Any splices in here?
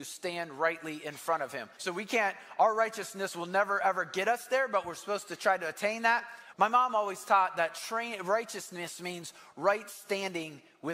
yes; 2 cuts; at 1.8 s, 6.5 s

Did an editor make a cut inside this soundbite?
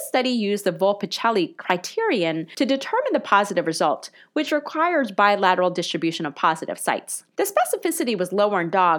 yes; 1 cut; at 7.3 s

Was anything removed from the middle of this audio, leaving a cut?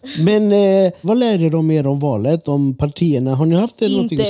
yes; 1 cut; at 1.0 s

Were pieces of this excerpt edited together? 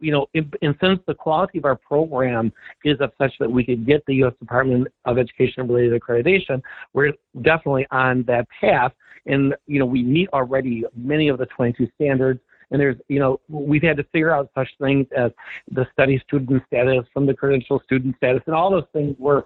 no; 0 cuts

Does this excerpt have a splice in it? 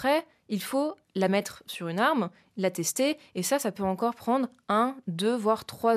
no; 0 cuts

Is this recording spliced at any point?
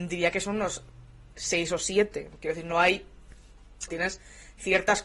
yes; 1 cut; at 3.9 s

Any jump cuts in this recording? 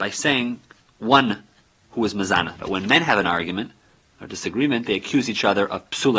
yes; 1 cut; at 2.6 s

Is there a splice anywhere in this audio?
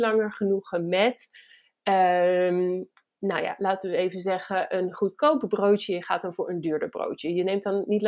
no; 0 cuts

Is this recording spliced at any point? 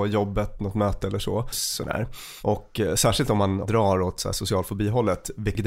yes; 1 cut; at 1.5 s

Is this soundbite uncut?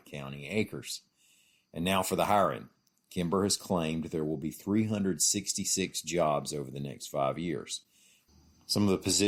yes; 0 cuts

